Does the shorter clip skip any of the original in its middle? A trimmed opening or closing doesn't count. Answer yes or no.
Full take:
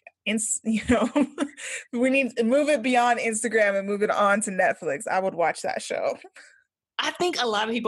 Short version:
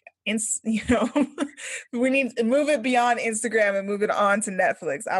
no